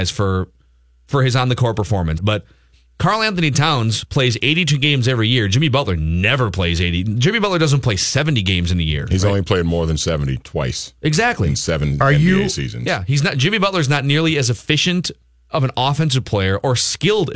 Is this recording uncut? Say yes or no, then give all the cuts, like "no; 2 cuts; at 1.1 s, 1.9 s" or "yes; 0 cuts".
no; 1 cut; at 2.2 s